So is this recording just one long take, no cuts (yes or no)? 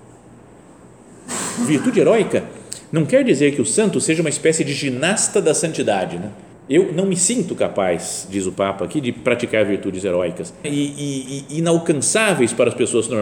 no